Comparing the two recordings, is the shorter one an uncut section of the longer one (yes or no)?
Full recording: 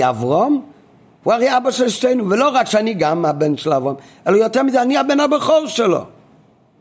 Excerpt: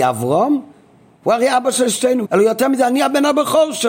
no